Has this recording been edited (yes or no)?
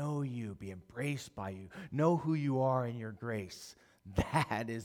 no